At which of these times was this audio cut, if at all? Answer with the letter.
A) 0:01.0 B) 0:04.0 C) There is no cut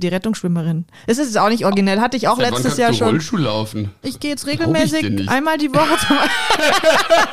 B